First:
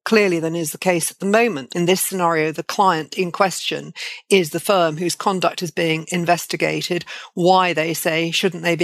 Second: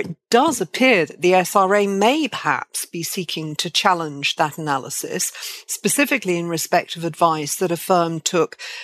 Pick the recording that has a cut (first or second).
first